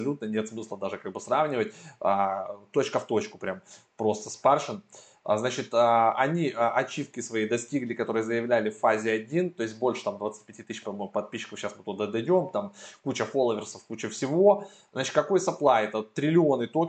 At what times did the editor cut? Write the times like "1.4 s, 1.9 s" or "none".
none